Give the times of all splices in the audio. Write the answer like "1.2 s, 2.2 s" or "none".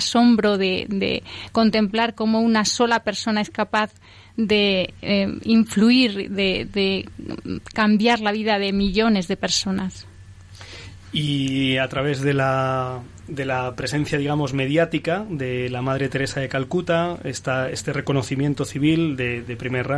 none

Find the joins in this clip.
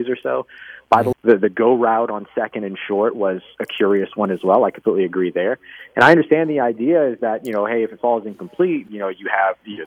1.1 s, 8.9 s

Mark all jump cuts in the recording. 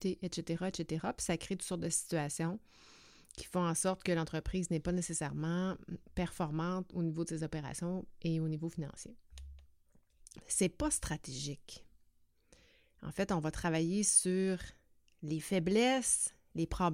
10.4 s

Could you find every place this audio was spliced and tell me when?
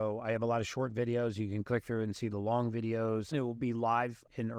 3.3 s

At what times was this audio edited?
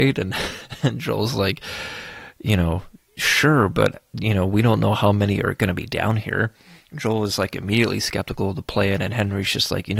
none

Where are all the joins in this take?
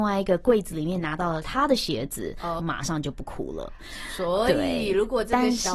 2.6 s

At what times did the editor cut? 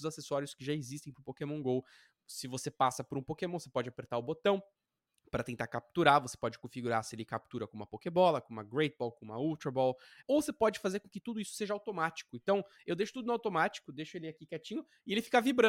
10.2 s

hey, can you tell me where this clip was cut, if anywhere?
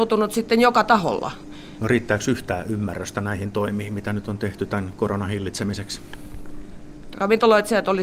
1.8 s, 7.1 s

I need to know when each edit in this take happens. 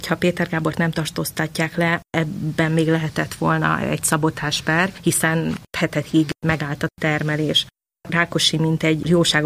none

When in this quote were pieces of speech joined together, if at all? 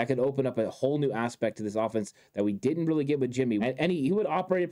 3.6 s

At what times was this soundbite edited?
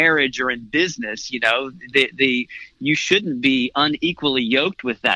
none

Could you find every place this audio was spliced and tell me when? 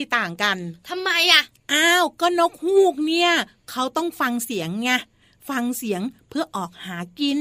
none

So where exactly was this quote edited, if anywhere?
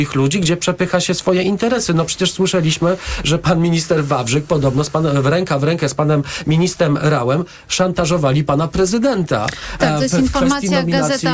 none

